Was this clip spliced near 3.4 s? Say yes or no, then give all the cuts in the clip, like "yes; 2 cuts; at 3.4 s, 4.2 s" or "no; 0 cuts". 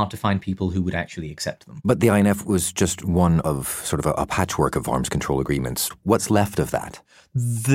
yes; 1 cut; at 3.4 s